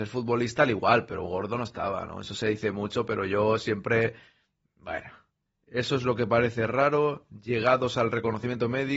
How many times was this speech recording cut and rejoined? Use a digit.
1